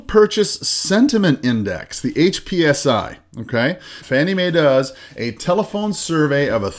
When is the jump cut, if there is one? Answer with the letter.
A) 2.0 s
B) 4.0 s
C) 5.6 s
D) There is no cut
B